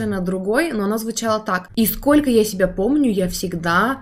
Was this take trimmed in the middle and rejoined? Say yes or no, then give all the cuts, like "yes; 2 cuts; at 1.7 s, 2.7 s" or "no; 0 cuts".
yes; 1 cut; at 1.7 s